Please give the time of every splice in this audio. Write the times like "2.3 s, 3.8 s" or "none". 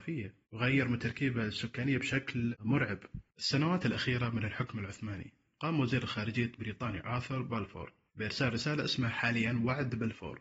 3.3 s

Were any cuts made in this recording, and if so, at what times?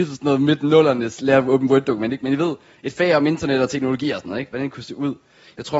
none

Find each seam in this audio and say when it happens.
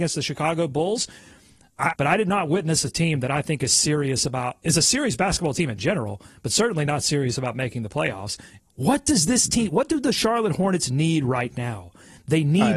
1.9 s, 8.6 s

